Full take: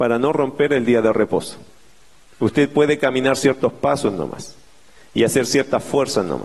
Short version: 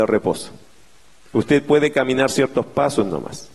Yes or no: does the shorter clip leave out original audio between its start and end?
no